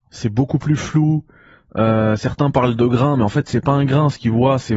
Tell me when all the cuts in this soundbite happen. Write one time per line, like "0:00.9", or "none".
none